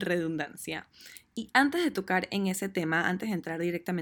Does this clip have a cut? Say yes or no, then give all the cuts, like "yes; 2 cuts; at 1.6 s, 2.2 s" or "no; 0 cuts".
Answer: no; 0 cuts